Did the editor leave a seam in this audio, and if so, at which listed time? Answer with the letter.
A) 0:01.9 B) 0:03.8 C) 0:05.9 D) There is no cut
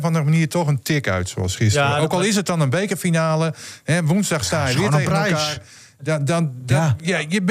D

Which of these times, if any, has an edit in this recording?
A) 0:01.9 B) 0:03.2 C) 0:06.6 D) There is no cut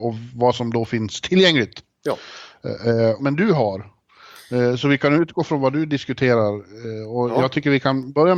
B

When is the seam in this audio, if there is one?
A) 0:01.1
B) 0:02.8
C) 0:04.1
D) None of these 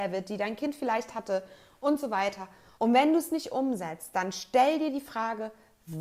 B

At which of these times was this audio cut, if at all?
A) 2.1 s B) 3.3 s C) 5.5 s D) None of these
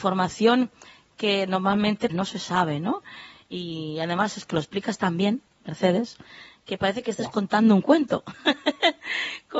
A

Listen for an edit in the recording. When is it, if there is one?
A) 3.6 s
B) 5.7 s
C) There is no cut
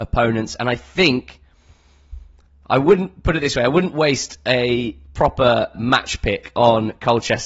B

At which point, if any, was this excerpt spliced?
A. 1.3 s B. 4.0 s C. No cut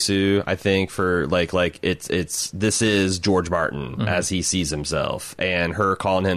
C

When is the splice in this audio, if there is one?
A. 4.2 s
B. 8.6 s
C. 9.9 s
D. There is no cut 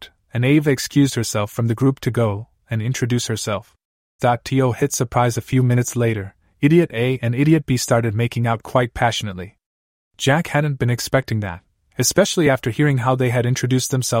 A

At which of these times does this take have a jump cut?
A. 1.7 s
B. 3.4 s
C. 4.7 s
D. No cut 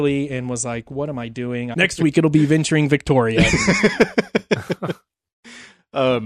A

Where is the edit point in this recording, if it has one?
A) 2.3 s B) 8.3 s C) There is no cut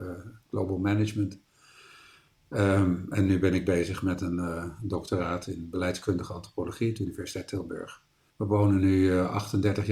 B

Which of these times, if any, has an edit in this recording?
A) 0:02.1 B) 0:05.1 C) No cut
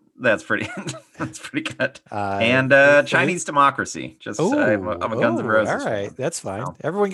A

